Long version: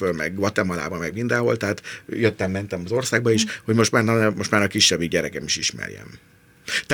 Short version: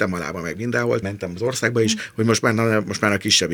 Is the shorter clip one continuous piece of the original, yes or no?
no